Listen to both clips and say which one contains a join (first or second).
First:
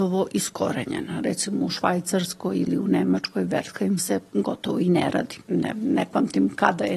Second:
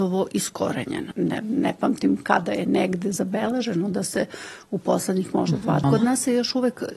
second